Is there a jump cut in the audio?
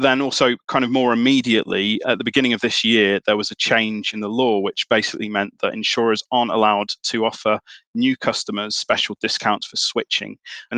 no; 0 cuts

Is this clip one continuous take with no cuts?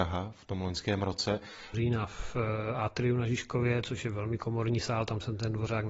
no; 1 cut; at 1.7 s

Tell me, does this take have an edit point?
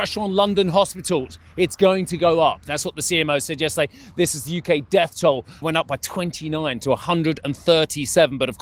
yes; 1 cut; at 5.6 s

